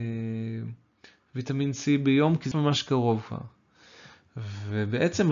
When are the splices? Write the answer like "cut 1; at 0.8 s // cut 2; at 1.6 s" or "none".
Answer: cut 1; at 2.5 s

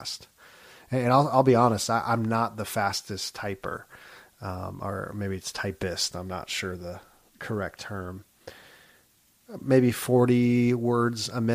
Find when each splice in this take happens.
none

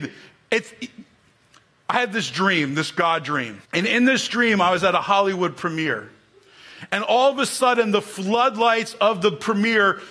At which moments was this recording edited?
cut 1; at 3.6 s

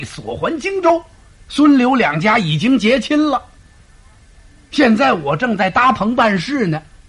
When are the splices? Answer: cut 1; at 1.4 s

